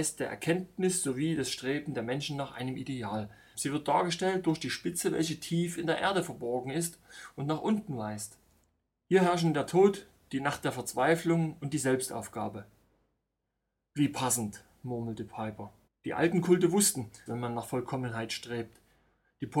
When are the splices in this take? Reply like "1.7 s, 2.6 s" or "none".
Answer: 3.5 s, 15.9 s, 17.3 s

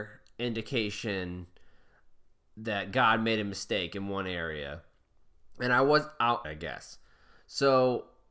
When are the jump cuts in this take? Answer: 6.4 s

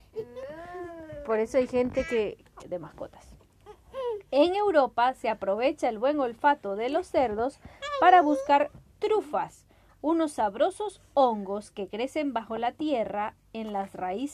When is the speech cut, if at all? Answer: 2.6 s

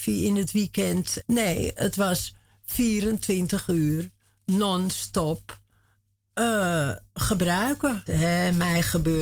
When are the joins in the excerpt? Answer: 1.2 s, 8.1 s

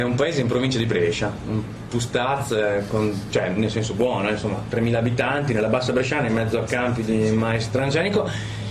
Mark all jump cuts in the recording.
none

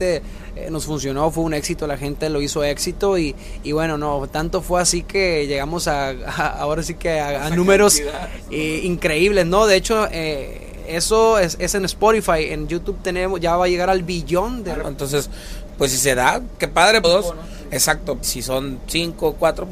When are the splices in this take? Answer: 14.8 s, 17.0 s, 18.2 s

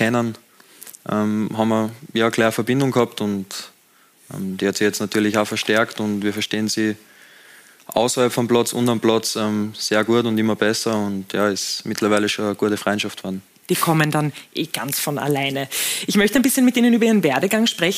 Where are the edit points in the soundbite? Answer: 13.6 s

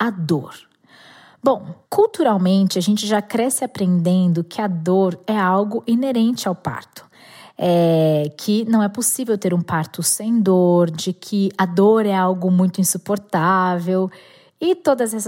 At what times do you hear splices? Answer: none

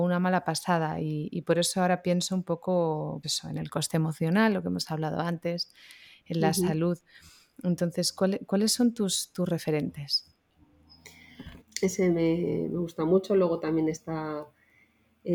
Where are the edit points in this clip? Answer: 3.2 s, 11.6 s

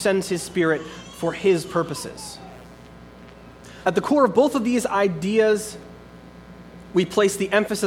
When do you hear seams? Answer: 3.8 s

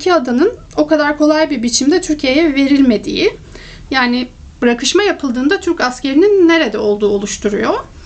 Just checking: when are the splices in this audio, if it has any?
3.9 s

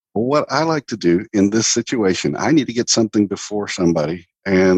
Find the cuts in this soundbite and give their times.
none

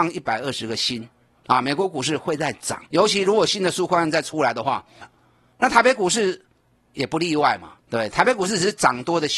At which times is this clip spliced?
2.9 s, 5.0 s, 7.8 s

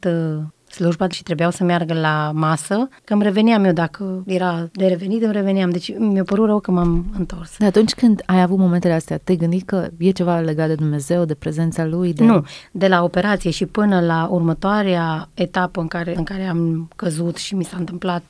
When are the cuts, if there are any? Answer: 3.1 s

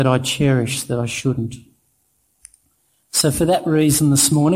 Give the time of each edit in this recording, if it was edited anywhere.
none

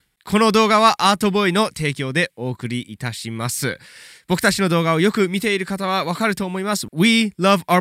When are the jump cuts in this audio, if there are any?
none

